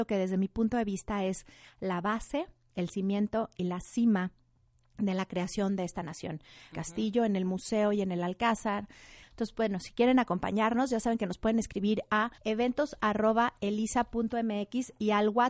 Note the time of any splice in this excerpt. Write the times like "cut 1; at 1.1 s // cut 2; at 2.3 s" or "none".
cut 1; at 6.7 s // cut 2; at 9.2 s // cut 3; at 12.4 s